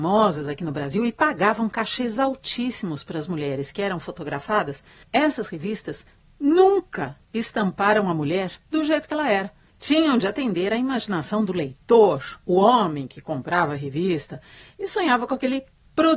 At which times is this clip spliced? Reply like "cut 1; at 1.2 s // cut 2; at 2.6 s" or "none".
none